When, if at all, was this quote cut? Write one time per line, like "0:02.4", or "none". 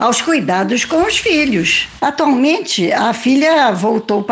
0:02.0

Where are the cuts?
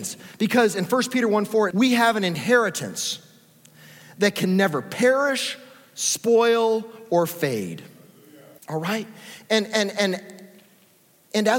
0:01.7
0:08.6

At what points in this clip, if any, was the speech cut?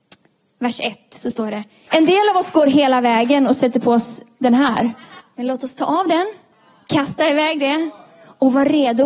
0:01.9
0:05.2

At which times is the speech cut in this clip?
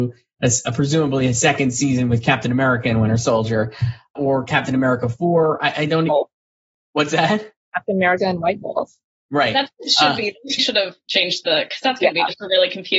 0:04.1
0:06.1
0:10.6

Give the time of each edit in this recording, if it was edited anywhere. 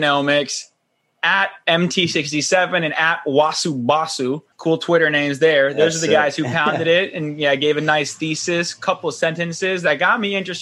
0:04.5

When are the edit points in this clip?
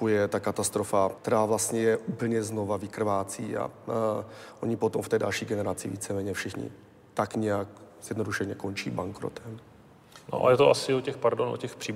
0:01.2

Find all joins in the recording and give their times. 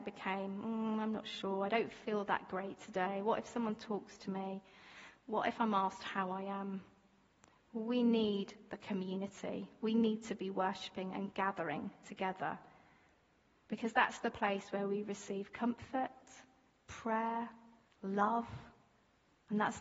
0:17.9

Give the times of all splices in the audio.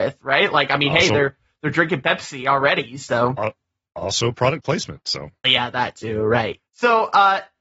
0:05.4
0:06.6

